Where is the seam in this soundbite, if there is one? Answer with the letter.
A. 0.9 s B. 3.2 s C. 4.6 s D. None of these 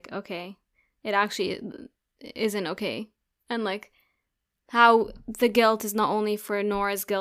D